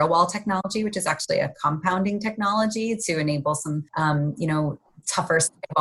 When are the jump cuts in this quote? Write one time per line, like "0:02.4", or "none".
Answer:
0:03.9